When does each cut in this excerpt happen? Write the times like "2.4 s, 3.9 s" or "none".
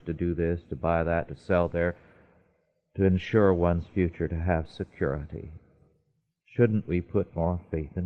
1.3 s